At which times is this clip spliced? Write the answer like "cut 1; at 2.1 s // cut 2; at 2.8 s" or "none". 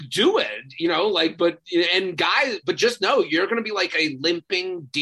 none